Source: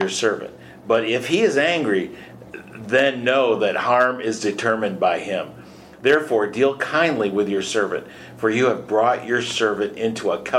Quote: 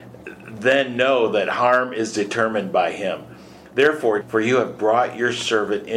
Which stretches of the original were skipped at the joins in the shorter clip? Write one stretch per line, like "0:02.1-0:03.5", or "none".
0:06.5-0:08.3